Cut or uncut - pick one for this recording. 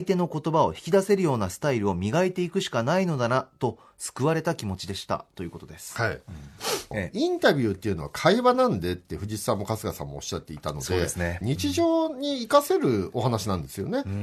cut